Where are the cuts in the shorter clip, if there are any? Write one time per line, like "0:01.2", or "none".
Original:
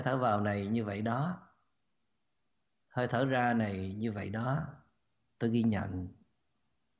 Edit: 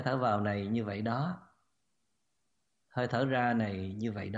none